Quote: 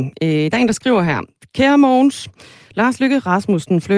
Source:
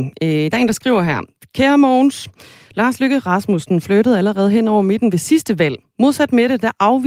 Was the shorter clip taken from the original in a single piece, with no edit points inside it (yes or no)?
yes